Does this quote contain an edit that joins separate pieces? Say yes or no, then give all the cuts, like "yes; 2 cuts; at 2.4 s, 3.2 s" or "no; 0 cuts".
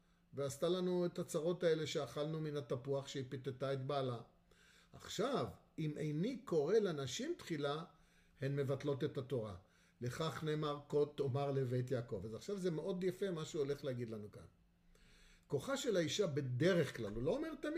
no; 0 cuts